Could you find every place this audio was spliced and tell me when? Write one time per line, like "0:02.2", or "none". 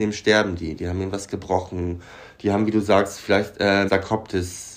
0:03.9